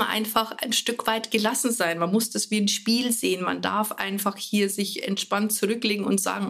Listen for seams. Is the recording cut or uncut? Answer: uncut